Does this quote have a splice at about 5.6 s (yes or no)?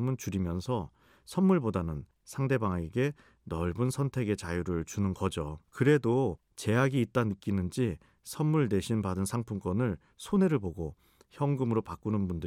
yes